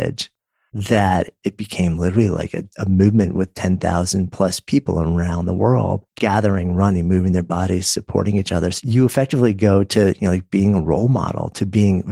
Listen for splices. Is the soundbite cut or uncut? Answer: cut